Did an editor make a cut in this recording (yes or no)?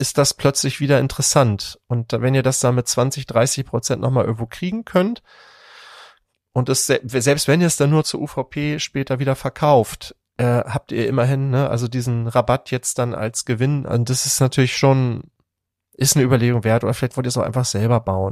no